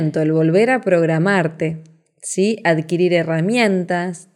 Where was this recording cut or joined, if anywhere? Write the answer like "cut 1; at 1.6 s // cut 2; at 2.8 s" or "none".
none